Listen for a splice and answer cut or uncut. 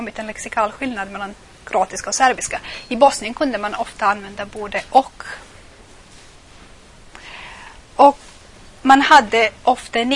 uncut